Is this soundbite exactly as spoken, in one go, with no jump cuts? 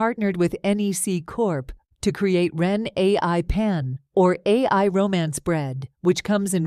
yes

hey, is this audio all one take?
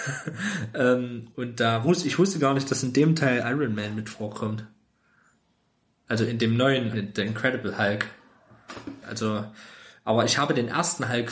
no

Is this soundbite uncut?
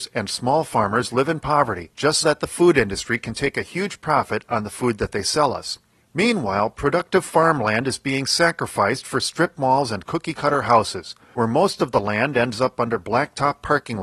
no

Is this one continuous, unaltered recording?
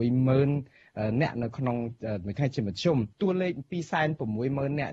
no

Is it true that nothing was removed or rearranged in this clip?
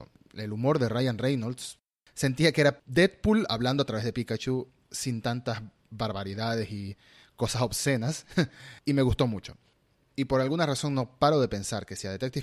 yes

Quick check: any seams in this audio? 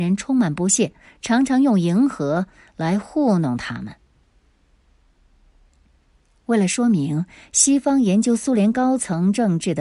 no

